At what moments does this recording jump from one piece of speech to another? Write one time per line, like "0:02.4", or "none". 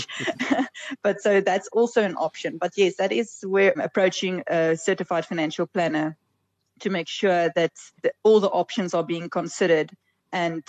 0:03.7
0:08.0